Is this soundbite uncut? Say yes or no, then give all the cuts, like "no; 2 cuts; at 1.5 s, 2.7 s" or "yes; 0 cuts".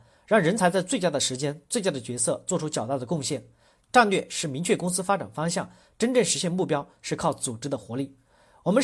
no; 1 cut; at 3.8 s